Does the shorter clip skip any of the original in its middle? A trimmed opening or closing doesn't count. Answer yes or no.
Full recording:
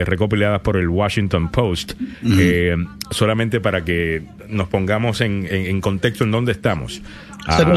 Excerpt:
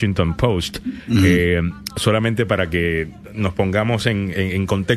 no